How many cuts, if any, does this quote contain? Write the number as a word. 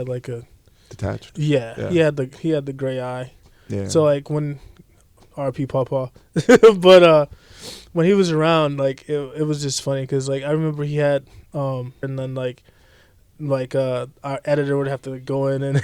one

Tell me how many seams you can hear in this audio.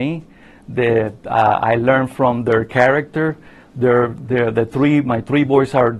zero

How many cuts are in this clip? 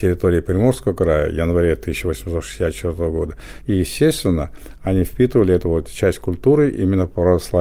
one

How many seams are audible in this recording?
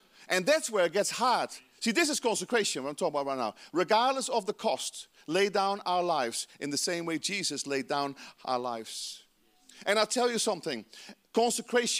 zero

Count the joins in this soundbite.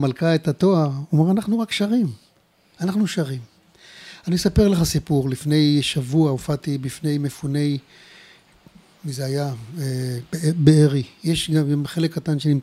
zero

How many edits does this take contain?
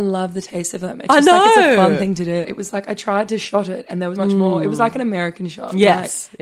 two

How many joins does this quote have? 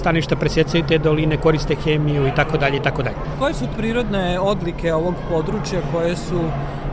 one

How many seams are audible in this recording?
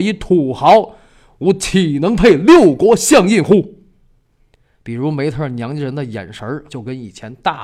two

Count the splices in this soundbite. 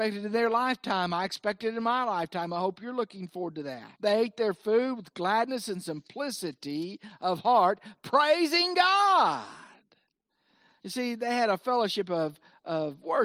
one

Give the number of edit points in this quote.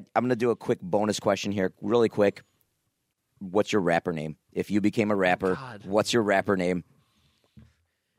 zero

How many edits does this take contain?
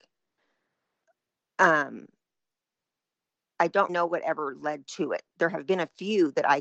one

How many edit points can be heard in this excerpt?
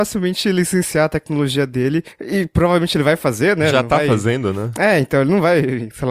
zero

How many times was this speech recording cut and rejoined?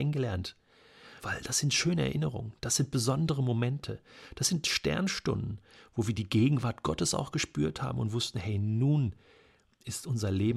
one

